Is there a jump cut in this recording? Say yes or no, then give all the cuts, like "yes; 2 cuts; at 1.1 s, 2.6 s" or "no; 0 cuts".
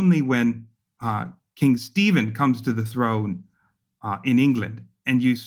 no; 0 cuts